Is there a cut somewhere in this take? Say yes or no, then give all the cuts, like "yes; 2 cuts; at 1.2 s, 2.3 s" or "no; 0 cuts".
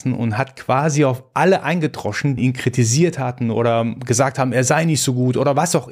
yes; 1 cut; at 2.4 s